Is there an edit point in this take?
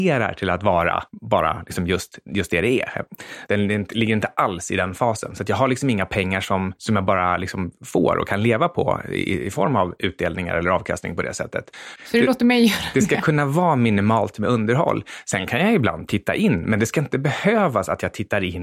yes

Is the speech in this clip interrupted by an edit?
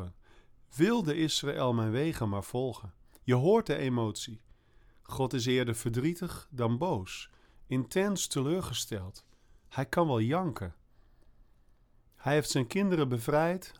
no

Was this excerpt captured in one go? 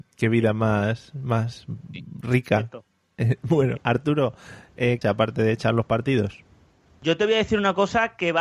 no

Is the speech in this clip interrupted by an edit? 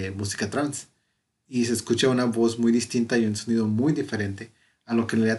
no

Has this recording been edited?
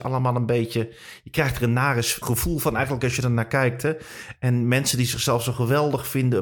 yes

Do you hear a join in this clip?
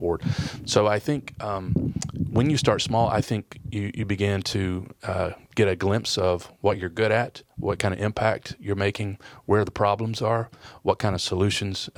no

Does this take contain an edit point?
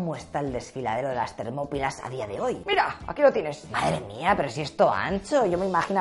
no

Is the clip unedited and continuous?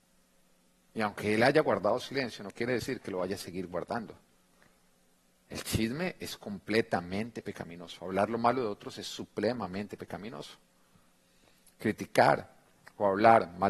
yes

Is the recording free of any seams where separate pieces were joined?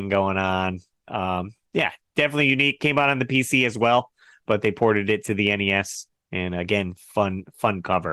yes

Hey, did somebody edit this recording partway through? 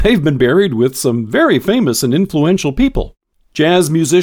no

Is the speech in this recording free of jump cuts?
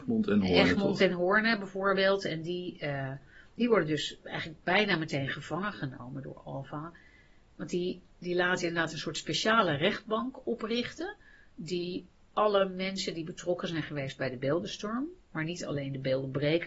yes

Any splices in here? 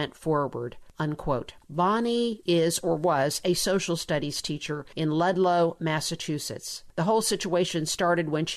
no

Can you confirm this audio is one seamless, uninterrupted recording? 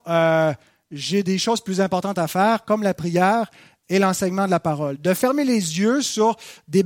yes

